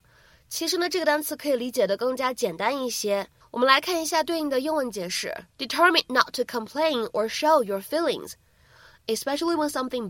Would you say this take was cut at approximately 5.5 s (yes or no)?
yes